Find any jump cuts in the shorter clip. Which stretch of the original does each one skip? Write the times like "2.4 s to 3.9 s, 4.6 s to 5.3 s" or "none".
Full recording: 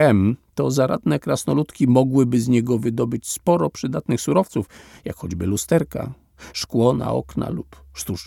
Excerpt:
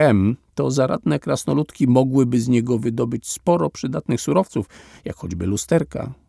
none